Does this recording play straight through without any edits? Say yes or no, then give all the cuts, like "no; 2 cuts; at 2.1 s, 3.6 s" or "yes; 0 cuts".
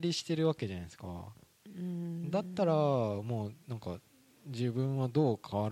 yes; 0 cuts